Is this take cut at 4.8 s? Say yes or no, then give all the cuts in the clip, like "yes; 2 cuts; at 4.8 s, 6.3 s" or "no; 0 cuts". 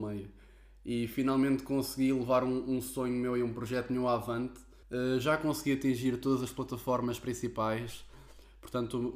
yes; 1 cut; at 4.8 s